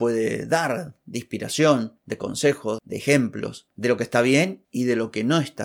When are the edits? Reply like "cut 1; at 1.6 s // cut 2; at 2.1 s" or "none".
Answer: cut 1; at 2.8 s